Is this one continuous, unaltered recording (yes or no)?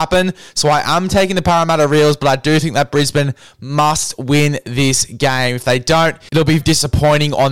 no